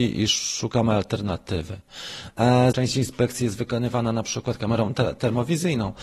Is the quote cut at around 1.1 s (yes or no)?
no